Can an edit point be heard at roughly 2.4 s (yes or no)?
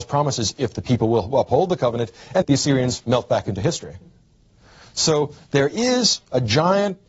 yes